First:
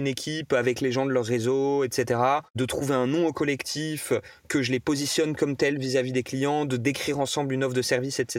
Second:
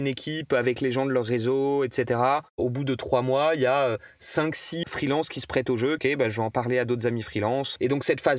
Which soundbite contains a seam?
second; 3 cuts; at 2.5 s, 4.8 s, 6.0 s

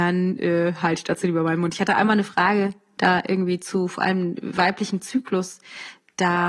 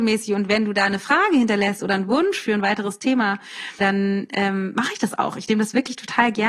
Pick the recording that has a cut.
second; 1 cut; at 3.8 s

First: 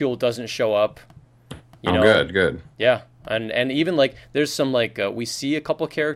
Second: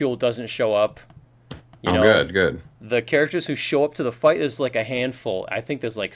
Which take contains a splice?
second; 1 cut; at 2.7 s

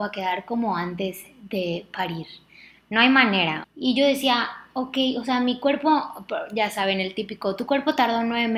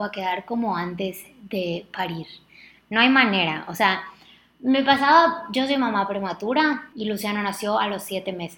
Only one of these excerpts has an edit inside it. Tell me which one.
first; 1 cut; at 3.6 s

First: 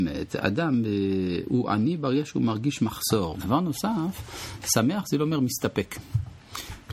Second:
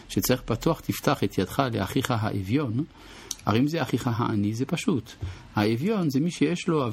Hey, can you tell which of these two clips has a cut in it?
first; 1 cut; at 3.3 s

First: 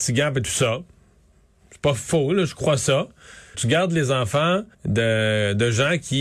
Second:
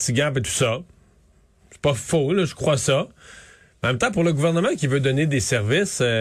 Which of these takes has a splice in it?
first; 2 cuts; at 3.5 s, 4.7 s

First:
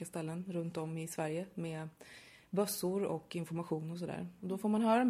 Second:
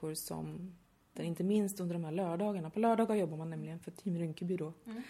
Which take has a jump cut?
second; 1 cut; at 1.2 s

